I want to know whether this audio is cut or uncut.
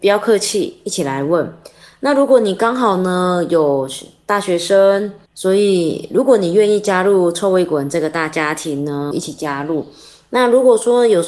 cut